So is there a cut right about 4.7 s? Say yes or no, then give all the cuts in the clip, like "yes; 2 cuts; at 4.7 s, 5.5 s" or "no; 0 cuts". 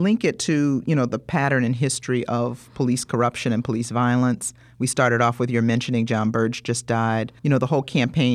no; 1 cut; at 7.4 s